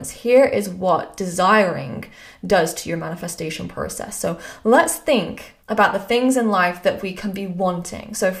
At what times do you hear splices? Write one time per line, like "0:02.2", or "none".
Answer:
0:05.6